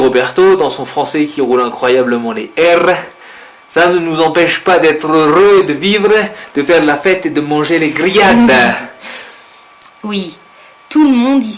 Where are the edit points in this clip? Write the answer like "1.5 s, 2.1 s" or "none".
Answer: 9.9 s